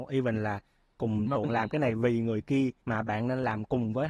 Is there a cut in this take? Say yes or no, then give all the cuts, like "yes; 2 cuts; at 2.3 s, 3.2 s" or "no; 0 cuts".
yes; 2 cuts; at 1.4 s, 2.8 s